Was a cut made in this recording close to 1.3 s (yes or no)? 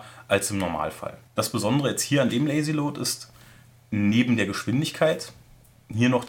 yes